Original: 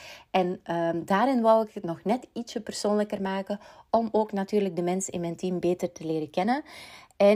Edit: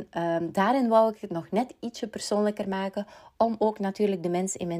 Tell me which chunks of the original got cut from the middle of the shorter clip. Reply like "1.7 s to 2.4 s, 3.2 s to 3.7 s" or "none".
none